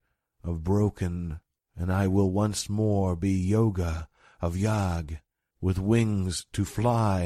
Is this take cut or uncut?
cut